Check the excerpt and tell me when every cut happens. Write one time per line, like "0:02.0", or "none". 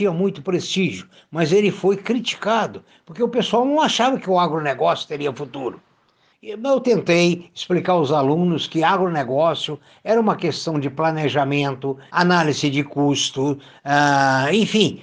0:06.3
0:12.1

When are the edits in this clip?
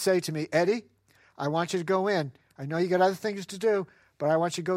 none

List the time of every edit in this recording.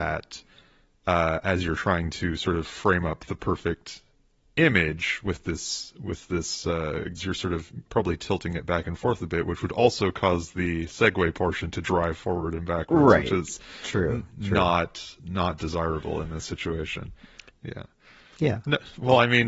0:07.2
0:17.5

